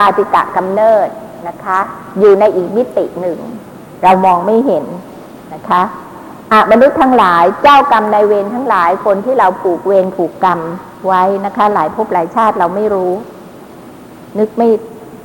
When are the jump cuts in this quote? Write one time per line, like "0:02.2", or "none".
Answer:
none